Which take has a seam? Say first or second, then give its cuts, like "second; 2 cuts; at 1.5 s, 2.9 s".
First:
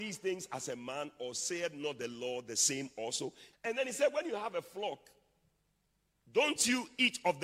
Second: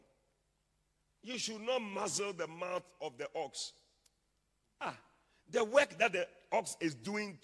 first; 1 cut; at 3.5 s